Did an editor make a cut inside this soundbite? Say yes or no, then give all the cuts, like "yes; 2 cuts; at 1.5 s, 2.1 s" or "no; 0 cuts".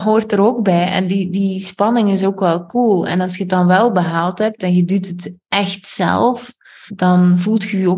yes; 1 cut; at 6.9 s